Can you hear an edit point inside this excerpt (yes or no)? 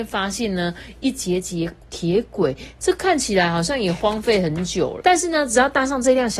yes